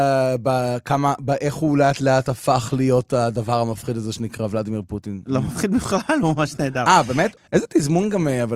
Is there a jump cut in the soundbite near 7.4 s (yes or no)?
yes